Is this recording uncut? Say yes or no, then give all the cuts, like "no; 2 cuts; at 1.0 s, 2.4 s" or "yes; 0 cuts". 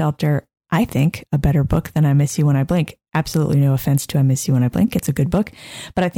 yes; 0 cuts